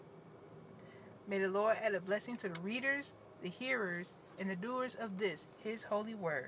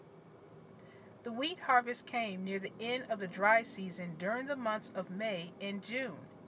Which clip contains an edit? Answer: first; 1 cut; at 1.2 s

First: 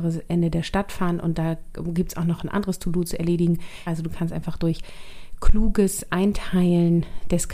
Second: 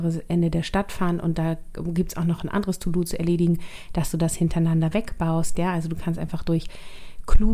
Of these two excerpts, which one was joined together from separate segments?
first; 1 cut; at 3.9 s

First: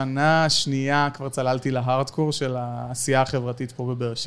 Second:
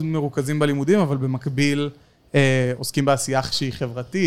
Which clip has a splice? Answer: second; 1 cut; at 2.8 s

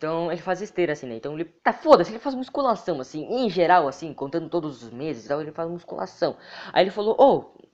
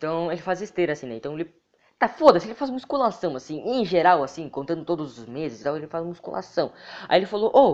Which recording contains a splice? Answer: first; 1 cut; at 1.6 s

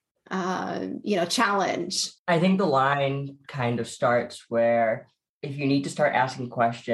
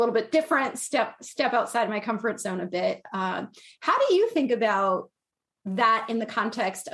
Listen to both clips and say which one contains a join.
first; 1 cut; at 2.2 s

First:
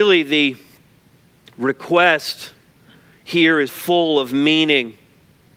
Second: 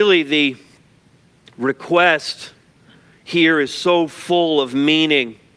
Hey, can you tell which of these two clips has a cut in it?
first; 1 cut; at 3.7 s

